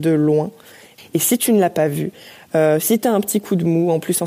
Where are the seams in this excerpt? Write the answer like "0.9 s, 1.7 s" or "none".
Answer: 1.0 s